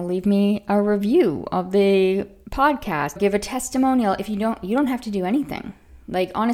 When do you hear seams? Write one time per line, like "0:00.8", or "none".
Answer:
0:03.2